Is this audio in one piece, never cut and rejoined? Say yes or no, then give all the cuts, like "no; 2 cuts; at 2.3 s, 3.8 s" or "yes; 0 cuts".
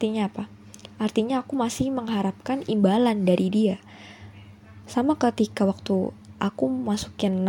no; 1 cut; at 4.8 s